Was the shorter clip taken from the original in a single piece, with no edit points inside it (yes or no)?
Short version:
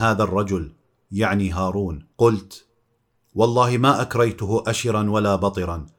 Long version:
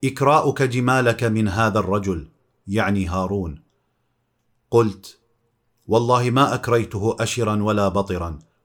no